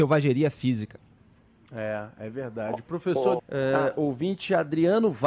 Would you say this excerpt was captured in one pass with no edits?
no; 1 cut; at 3.4 s

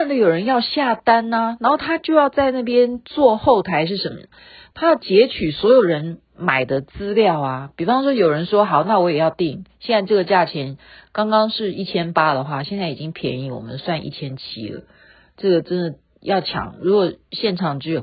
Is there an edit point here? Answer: no; 0 cuts

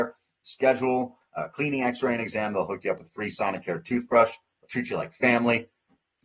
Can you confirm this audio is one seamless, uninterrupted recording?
yes; 0 cuts

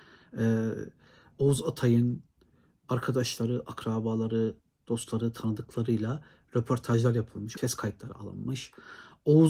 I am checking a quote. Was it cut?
yes; 1 cut; at 7.6 s

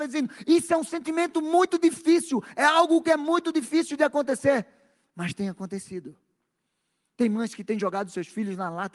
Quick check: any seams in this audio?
no; 0 cuts

